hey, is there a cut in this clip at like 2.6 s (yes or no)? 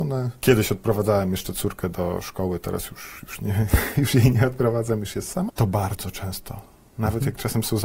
no